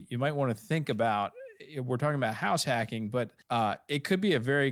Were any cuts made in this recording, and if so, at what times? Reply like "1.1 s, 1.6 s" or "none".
3.4 s